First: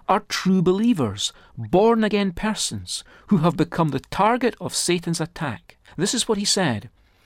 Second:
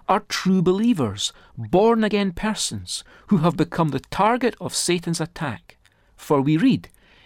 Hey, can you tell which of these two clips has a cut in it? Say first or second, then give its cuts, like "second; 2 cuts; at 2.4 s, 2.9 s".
first; 1 cut; at 5.9 s